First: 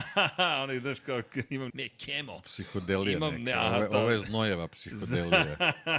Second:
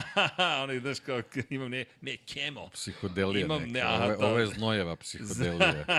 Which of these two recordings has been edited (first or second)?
first